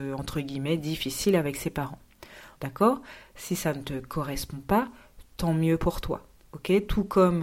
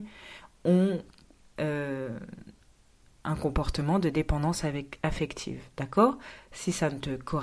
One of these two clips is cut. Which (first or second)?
first